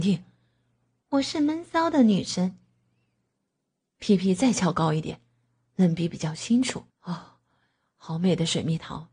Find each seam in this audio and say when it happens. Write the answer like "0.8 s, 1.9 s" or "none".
1.0 s, 6.9 s